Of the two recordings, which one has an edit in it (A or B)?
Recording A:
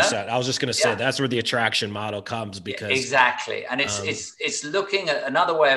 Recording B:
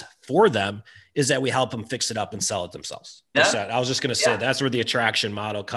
B